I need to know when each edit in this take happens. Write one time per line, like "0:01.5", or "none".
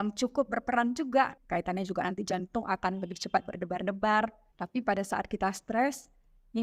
0:01.4
0:04.5